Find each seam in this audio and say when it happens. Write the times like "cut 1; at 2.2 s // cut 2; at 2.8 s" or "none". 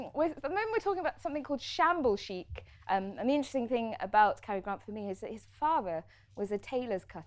cut 1; at 2.8 s

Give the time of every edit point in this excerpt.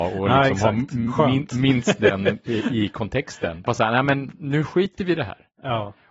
cut 1; at 3.7 s

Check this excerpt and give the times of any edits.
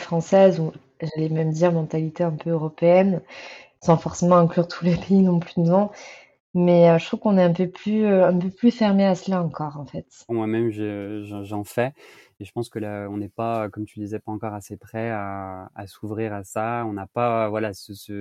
cut 1; at 10.3 s

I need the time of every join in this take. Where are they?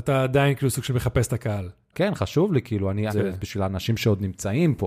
cut 1; at 1.9 s // cut 2; at 3.1 s

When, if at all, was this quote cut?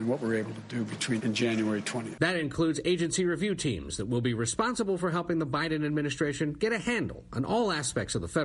cut 1; at 1.2 s

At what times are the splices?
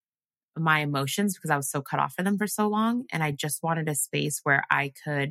none

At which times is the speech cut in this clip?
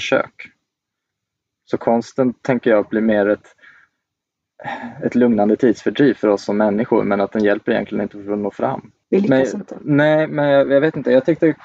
none

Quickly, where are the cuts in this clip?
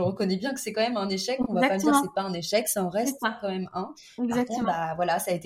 none

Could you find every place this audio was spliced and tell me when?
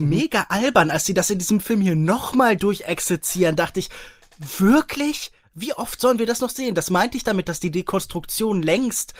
none

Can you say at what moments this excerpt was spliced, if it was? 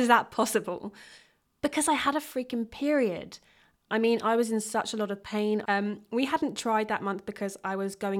cut 1; at 3.9 s // cut 2; at 5.6 s

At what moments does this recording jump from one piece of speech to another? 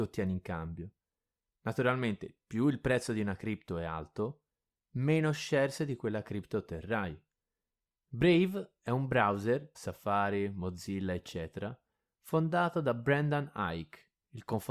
cut 1; at 7.9 s // cut 2; at 9.7 s

